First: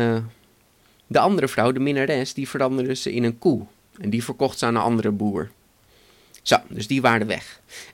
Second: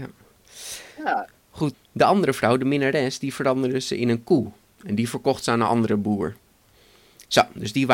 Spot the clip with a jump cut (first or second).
second